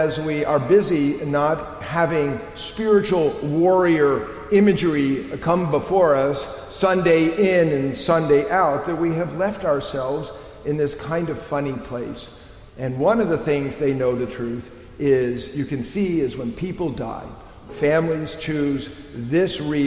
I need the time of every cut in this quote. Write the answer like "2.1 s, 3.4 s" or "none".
12.7 s, 17.7 s